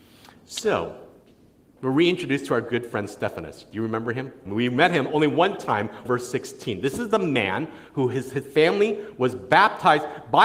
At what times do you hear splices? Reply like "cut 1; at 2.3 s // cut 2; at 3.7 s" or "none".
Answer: cut 1; at 4.5 s // cut 2; at 6.0 s